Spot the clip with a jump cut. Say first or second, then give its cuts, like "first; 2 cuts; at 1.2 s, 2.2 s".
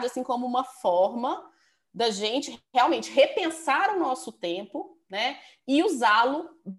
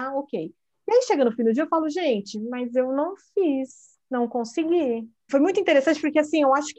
second; 1 cut; at 5.3 s